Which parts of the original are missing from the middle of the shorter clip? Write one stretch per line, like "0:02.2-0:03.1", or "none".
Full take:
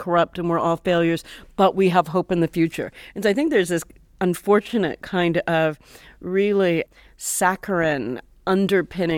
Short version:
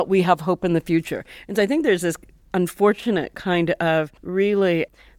0:05.8-0:06.2